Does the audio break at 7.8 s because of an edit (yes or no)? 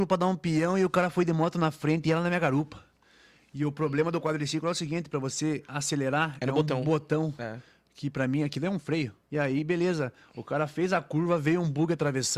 no